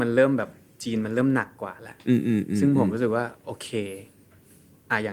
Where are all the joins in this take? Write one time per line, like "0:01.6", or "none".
none